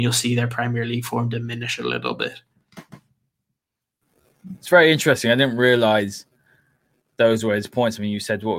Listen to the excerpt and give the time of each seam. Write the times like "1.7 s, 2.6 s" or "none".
4.6 s